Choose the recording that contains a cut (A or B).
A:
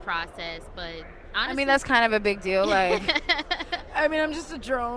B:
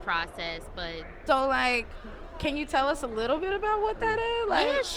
B